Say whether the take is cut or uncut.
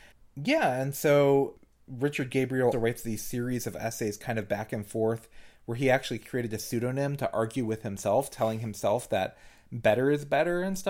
cut